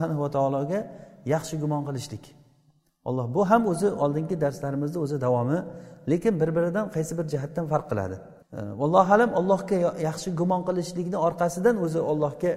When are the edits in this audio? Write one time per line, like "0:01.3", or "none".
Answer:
0:08.4